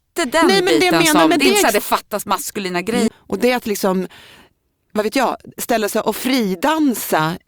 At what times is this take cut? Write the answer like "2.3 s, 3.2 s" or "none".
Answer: 3.1 s